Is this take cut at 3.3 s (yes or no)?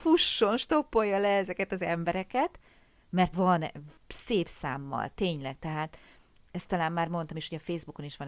yes